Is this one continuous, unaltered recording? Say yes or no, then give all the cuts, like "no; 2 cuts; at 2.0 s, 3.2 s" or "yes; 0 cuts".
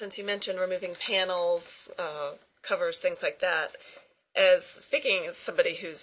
yes; 0 cuts